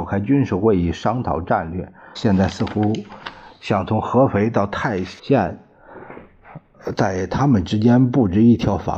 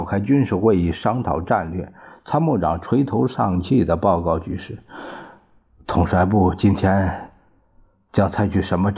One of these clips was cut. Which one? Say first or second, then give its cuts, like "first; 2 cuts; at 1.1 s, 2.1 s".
first; 2 cuts; at 2.1 s, 5.2 s